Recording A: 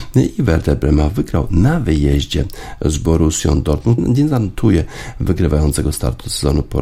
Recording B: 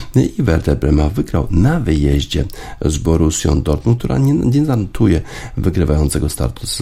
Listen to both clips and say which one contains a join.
A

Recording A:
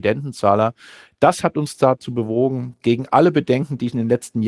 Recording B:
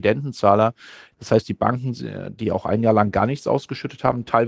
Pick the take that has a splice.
B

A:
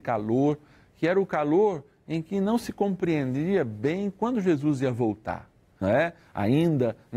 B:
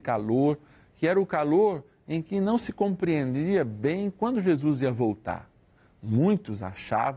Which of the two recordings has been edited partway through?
A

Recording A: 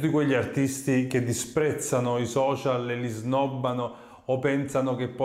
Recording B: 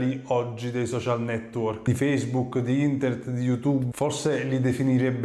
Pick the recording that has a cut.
B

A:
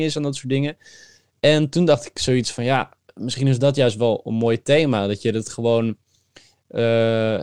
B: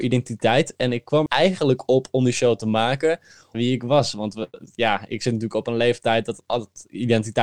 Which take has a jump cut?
B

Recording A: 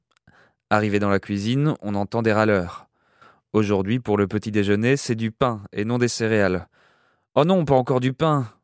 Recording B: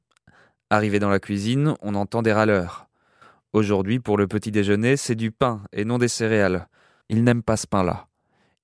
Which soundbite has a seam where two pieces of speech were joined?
B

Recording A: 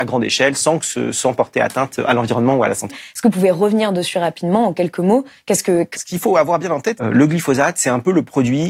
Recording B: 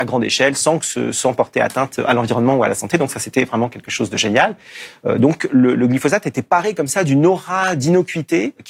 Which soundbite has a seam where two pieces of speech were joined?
A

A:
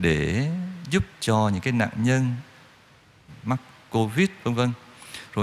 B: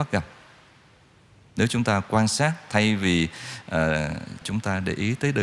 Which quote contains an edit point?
B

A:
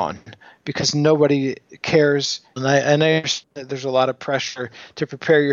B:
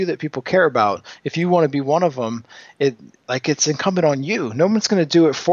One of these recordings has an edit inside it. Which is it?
A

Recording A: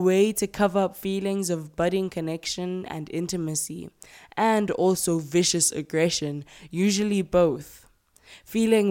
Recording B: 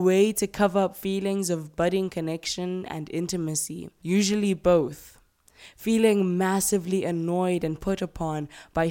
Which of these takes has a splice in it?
B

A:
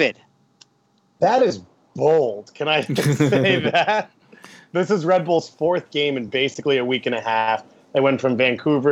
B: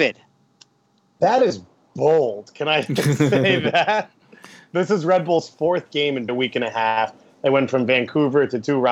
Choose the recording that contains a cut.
B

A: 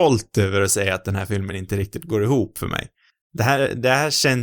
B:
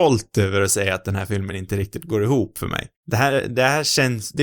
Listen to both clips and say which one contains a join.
B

